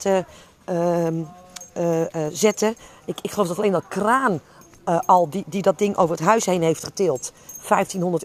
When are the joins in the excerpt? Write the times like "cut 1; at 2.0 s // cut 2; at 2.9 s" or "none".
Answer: none